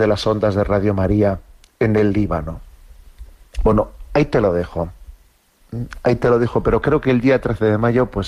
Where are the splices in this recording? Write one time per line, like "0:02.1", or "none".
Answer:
none